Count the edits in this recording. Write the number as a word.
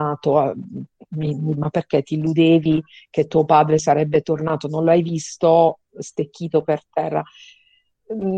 one